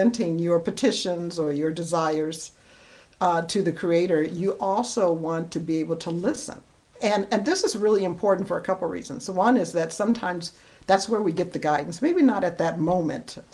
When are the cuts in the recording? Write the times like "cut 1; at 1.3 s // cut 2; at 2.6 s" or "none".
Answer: none